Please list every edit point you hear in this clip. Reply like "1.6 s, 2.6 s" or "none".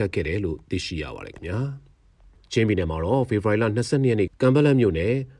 4.3 s